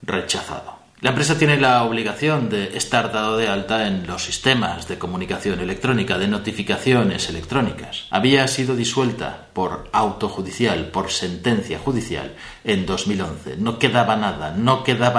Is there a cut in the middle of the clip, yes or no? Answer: no